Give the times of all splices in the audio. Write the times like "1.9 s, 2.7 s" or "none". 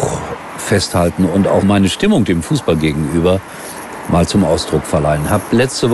1.6 s